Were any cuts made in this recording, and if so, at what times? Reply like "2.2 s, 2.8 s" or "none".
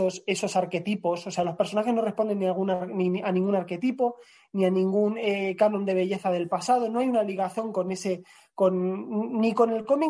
none